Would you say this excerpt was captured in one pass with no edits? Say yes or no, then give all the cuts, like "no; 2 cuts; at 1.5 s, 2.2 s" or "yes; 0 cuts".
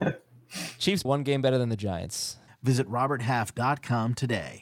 no; 2 cuts; at 1.0 s, 2.5 s